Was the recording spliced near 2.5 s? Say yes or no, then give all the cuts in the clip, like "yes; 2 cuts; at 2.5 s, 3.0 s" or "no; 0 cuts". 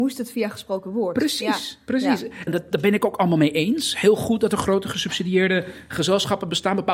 yes; 1 cut; at 2.5 s